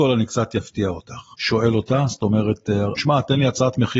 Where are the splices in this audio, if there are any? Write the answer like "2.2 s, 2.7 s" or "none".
1.3 s, 3.0 s